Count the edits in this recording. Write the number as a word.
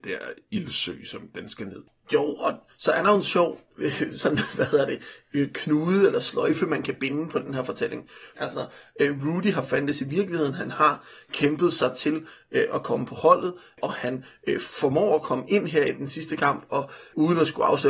one